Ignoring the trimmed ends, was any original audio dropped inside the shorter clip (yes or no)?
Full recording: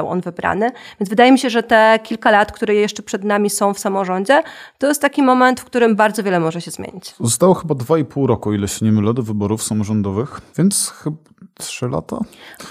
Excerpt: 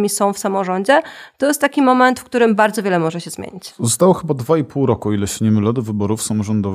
no